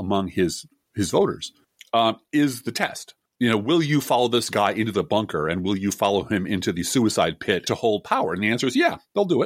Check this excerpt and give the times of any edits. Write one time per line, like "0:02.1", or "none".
0:07.7